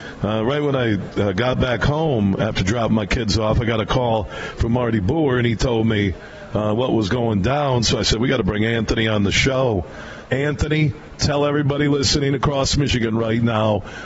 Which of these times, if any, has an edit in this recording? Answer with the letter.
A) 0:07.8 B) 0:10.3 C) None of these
B